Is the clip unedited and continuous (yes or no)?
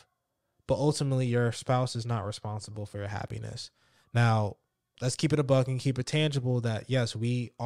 yes